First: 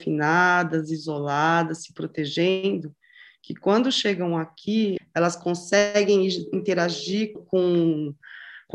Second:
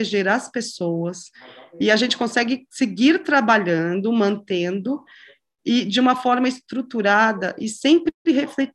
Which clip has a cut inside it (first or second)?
first